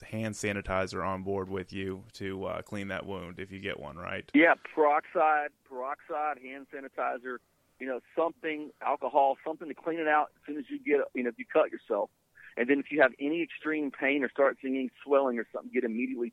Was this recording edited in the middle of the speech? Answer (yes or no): no